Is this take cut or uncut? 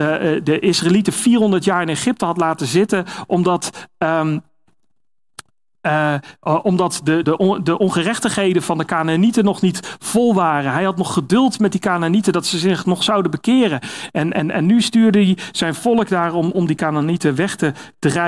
cut